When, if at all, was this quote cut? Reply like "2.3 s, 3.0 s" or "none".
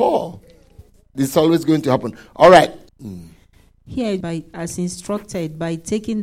2.9 s, 4.2 s

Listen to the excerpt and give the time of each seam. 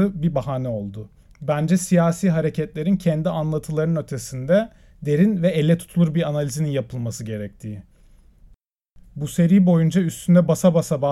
1.2 s

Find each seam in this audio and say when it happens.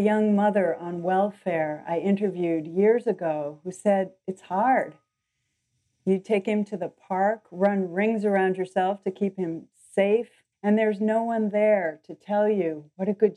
10.5 s

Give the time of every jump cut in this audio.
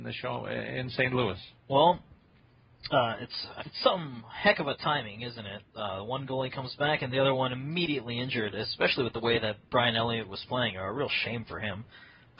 1.6 s, 3.6 s

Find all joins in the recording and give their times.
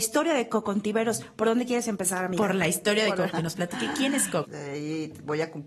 3.3 s, 4.4 s

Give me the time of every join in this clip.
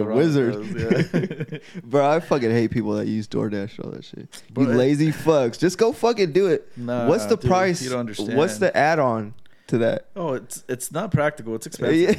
none

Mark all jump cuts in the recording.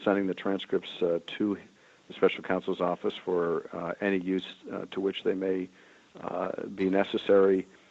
none

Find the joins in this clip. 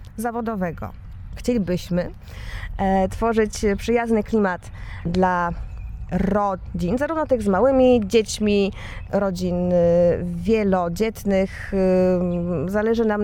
none

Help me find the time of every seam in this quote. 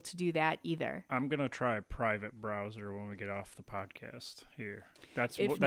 1.1 s

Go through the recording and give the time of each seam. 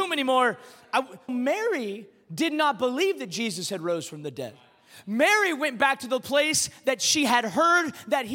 1.3 s

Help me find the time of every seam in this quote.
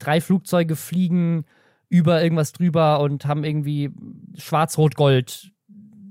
none

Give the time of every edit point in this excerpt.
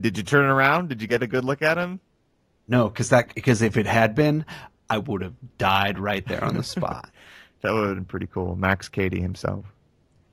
none

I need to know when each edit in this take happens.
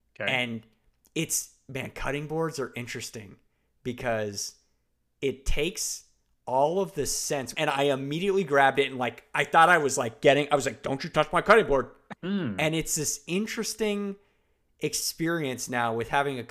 7.5 s, 12.2 s

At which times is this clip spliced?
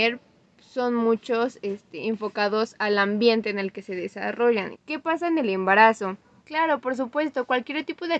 4.7 s, 6.4 s

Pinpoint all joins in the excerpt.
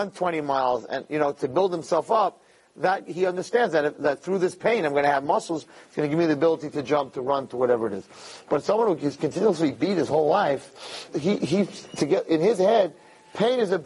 11.1 s

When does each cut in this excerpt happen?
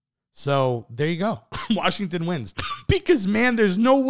2.5 s

